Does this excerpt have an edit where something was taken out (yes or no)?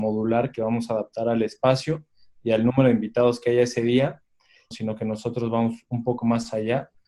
yes